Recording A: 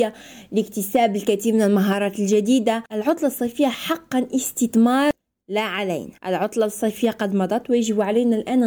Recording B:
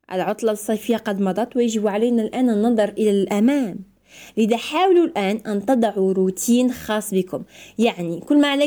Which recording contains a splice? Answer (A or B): A